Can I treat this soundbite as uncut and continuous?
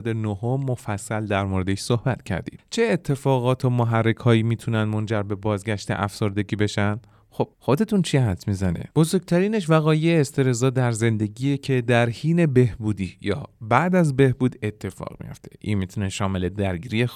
no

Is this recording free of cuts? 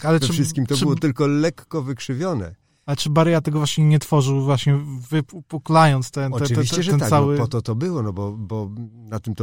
yes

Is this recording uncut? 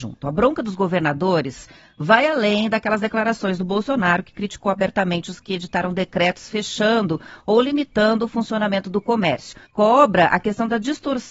no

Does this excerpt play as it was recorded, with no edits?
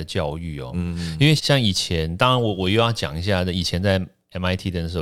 no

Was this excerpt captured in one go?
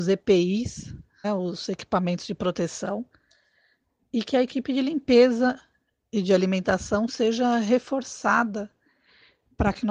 no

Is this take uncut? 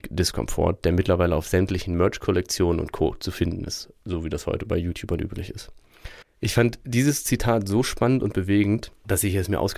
no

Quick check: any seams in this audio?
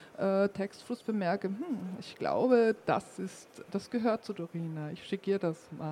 yes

